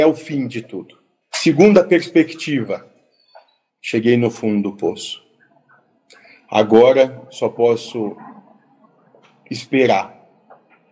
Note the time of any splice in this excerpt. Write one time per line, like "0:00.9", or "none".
0:01.2
0:03.7